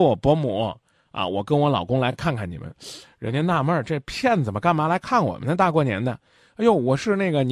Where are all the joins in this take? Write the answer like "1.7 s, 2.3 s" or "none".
none